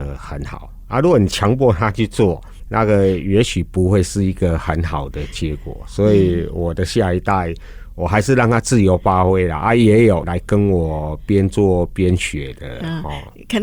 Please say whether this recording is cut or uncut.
uncut